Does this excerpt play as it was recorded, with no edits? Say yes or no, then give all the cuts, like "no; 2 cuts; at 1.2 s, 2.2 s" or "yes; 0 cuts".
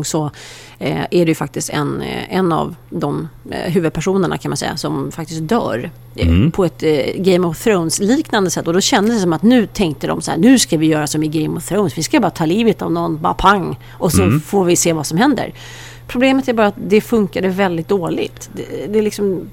yes; 0 cuts